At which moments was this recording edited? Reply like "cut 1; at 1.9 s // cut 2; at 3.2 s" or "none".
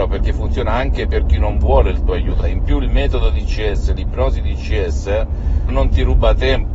cut 1; at 2.4 s // cut 2; at 5.7 s